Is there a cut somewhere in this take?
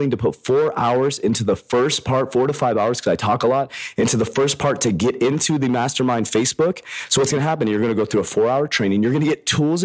no; 0 cuts

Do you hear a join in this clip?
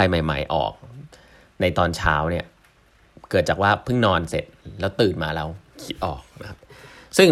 no; 0 cuts

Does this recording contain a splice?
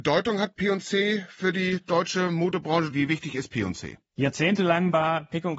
no; 0 cuts

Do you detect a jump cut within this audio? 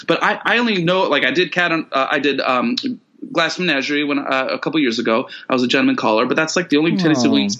no; 0 cuts

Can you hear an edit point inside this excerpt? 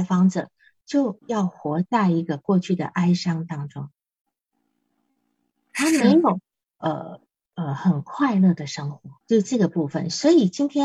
yes; 2 cuts; at 6.6 s, 9.2 s

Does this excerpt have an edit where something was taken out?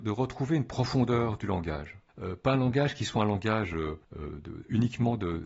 yes; 2 cuts; at 2.1 s, 4.0 s

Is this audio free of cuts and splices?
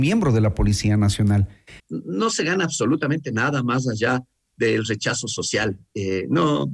no; 1 cut; at 1.8 s

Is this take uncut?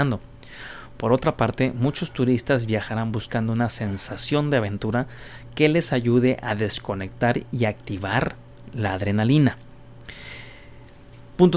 yes; 0 cuts

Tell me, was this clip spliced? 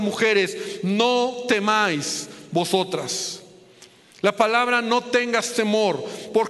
no; 0 cuts

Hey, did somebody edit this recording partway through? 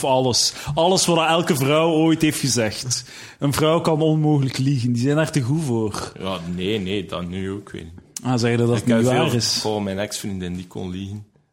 no; 0 cuts

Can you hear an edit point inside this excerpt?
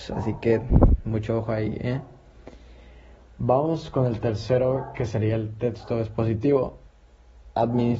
no; 0 cuts

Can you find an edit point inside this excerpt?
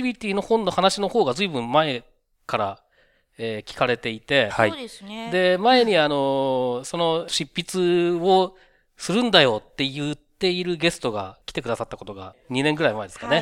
no; 0 cuts

